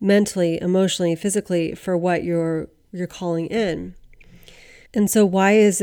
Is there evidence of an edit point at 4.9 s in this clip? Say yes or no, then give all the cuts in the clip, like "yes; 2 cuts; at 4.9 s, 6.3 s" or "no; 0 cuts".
yes; 1 cut; at 4.9 s